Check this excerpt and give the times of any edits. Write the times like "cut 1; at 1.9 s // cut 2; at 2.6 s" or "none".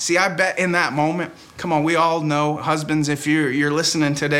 none